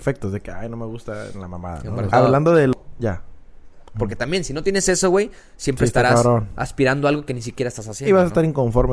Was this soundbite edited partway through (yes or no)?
yes